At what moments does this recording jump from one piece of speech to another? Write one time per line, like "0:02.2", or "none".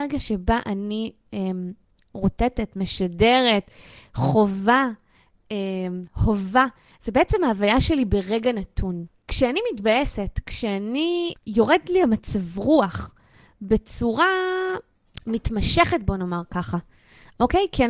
none